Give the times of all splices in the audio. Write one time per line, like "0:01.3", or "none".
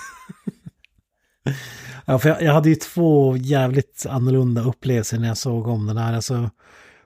none